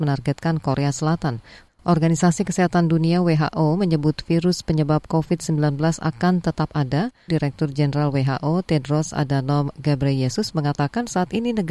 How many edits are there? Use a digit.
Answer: 2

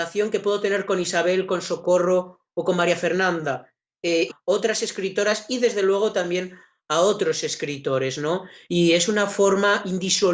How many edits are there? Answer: 2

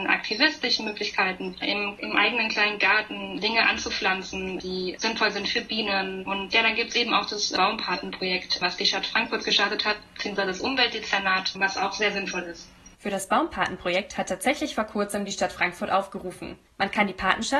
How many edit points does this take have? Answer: 1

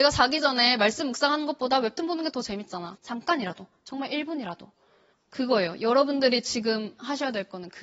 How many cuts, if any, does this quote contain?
2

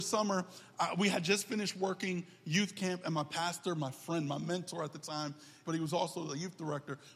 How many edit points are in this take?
1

